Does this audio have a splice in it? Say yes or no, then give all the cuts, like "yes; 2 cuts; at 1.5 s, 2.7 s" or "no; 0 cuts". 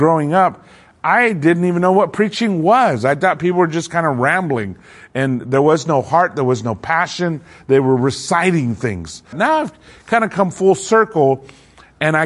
yes; 1 cut; at 9.3 s